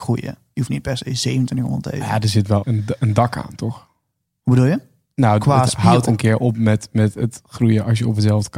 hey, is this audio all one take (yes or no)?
no